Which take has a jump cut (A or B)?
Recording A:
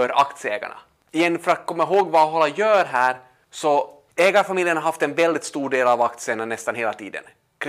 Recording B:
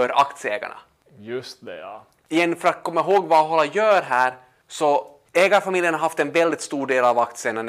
A